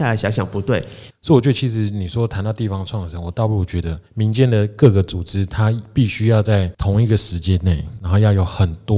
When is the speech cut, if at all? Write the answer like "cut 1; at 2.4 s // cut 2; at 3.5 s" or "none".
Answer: cut 1; at 1.1 s // cut 2; at 4.1 s